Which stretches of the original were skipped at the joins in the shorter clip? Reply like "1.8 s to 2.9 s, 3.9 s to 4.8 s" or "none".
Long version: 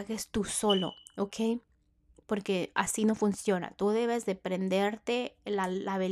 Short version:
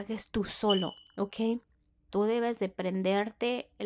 2.1 s to 3.8 s